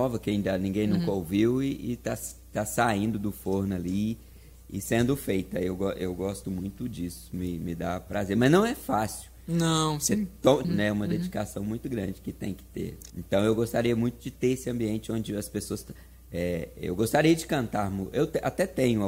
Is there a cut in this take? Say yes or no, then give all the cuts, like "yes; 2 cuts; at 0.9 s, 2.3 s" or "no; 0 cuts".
yes; 2 cuts; at 10.6 s, 13.1 s